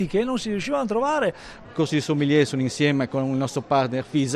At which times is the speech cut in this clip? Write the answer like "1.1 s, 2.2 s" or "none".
1.6 s